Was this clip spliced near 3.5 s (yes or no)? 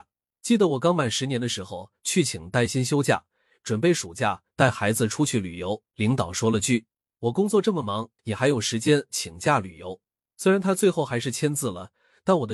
no